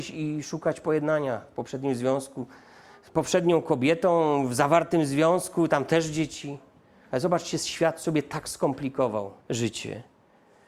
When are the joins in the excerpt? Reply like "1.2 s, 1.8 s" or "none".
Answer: 7.1 s, 9.4 s